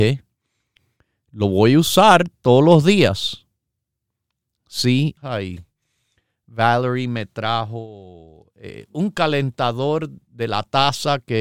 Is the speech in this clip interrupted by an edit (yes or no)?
yes